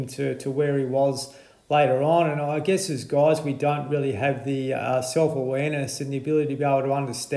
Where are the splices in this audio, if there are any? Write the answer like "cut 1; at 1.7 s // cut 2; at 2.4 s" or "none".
none